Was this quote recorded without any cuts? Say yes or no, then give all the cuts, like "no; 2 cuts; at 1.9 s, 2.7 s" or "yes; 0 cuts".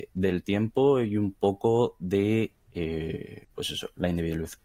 yes; 0 cuts